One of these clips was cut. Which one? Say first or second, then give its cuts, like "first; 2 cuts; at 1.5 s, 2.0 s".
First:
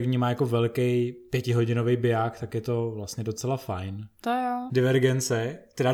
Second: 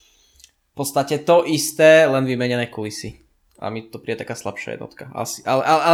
first; 1 cut; at 4.7 s